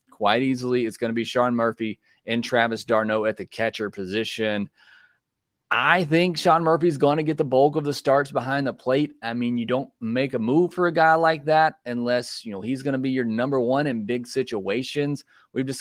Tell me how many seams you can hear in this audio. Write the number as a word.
zero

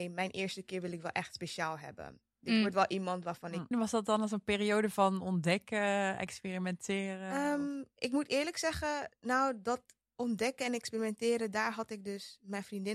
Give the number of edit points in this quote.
one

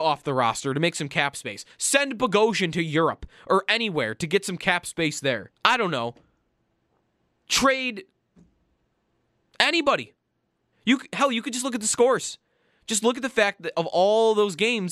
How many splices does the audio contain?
two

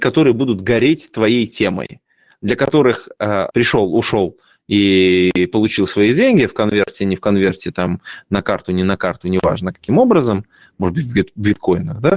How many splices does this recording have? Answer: one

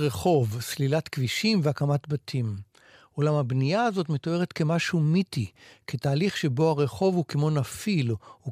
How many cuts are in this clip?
zero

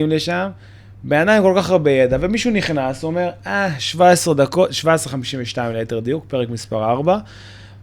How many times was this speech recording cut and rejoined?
zero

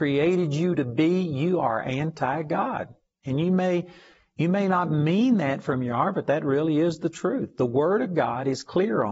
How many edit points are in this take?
zero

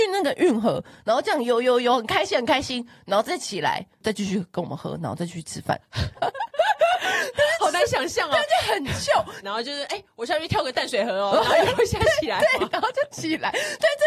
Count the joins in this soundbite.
two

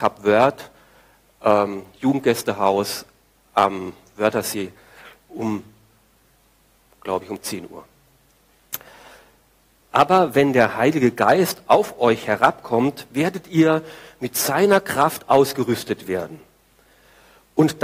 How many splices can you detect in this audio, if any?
one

